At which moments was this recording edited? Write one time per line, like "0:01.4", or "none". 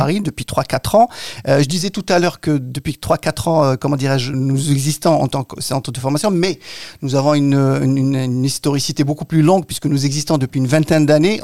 0:04.3